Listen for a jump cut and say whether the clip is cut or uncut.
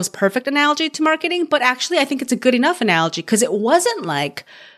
uncut